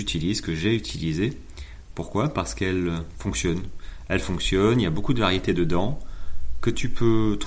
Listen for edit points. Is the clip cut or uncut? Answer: uncut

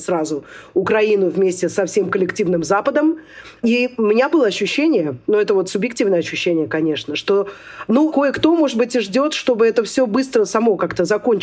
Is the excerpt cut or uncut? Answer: uncut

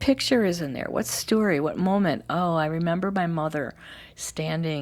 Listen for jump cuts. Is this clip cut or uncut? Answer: uncut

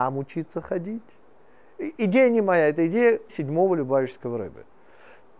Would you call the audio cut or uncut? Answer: cut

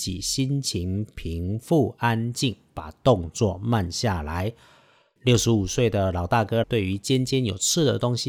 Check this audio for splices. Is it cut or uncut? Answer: cut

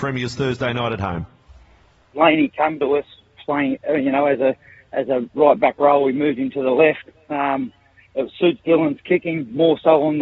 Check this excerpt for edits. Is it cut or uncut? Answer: cut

